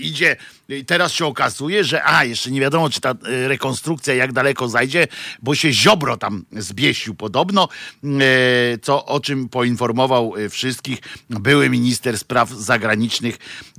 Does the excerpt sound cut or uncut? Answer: uncut